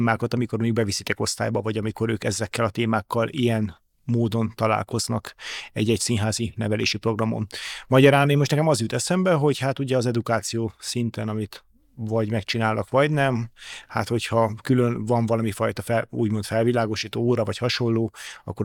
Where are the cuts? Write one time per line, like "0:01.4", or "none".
none